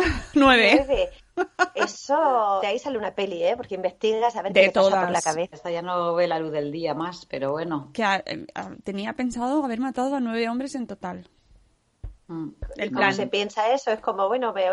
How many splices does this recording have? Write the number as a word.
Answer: two